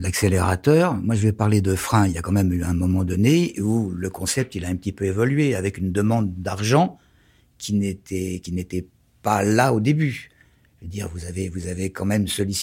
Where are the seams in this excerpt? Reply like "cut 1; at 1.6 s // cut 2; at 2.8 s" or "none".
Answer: none